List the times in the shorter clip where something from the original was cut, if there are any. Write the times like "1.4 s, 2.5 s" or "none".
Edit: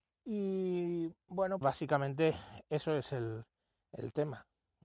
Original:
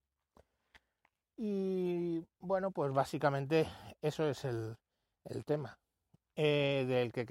1.6 s